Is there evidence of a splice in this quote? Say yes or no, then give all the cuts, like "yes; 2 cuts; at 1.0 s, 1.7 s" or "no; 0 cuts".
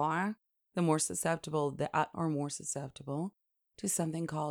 yes; 1 cut; at 2.1 s